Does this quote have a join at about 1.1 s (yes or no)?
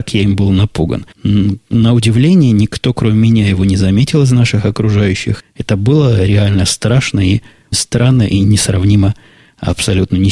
yes